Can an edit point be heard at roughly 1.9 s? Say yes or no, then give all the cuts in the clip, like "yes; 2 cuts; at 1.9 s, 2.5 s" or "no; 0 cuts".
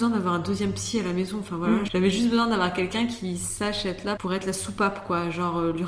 yes; 2 cuts; at 1.9 s, 4.2 s